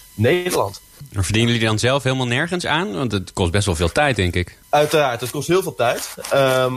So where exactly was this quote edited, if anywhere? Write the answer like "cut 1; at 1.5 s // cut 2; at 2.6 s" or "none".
cut 1; at 4.6 s